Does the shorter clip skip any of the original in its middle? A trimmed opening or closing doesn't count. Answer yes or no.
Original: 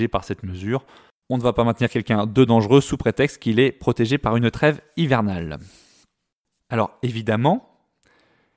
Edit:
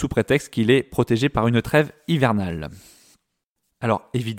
no